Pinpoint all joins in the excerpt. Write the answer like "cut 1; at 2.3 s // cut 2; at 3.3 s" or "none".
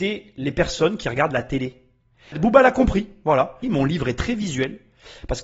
cut 1; at 2.3 s // cut 2; at 3.6 s